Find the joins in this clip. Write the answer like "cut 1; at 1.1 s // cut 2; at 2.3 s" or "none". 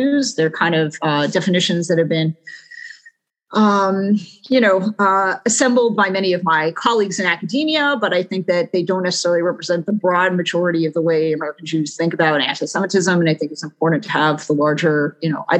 none